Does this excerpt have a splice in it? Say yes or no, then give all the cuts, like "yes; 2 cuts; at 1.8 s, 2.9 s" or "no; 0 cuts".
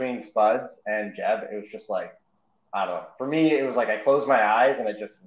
no; 0 cuts